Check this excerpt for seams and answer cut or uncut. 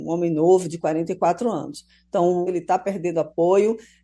cut